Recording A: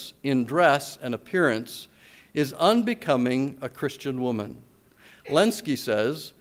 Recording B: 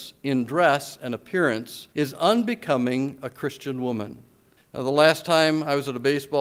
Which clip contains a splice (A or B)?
B